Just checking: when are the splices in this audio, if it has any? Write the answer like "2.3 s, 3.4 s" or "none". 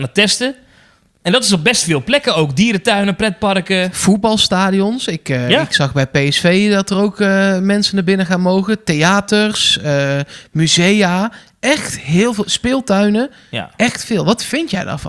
none